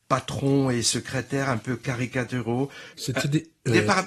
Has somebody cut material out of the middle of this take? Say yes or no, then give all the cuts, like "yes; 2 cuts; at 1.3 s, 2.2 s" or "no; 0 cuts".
yes; 1 cut; at 2.9 s